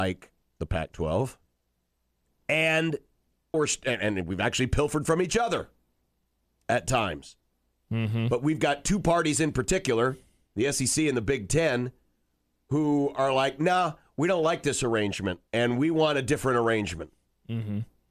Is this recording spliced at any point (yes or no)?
yes